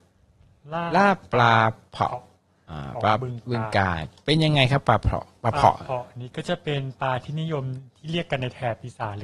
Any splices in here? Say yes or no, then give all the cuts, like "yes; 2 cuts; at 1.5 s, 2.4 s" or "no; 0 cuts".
no; 0 cuts